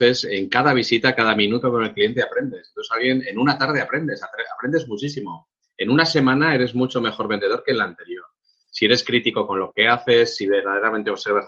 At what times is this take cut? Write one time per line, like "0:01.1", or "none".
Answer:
none